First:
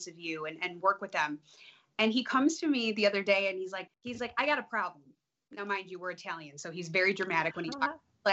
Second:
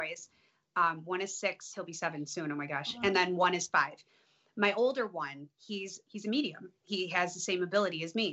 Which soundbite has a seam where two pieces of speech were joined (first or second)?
first